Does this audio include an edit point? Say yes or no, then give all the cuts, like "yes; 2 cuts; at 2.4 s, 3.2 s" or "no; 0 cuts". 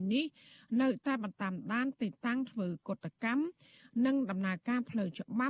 yes; 1 cut; at 1.3 s